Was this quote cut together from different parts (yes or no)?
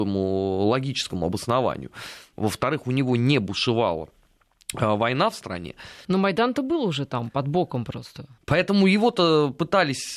yes